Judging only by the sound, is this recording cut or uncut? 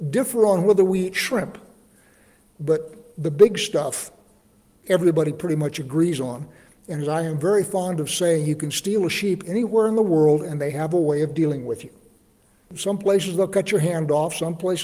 uncut